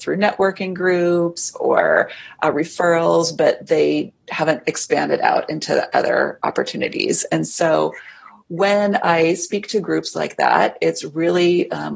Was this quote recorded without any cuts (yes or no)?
yes